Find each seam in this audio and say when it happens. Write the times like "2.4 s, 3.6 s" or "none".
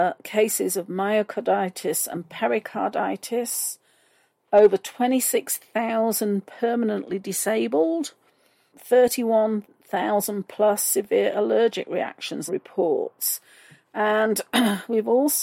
8.7 s, 12.5 s